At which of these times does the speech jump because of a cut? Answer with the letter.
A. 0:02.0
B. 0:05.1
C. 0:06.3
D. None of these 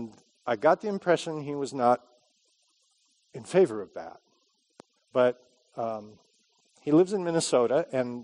B